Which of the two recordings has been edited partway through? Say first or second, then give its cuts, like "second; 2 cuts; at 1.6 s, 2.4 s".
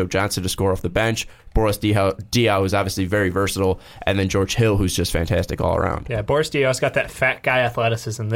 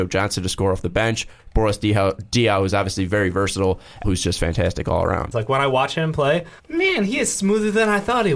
second; 3 cuts; at 4.0 s, 5.3 s, 6.6 s